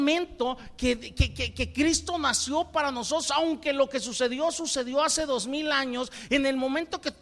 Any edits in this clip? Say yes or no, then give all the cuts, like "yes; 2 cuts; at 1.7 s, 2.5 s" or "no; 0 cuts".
no; 0 cuts